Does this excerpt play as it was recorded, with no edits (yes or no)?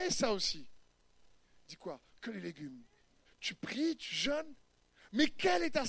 no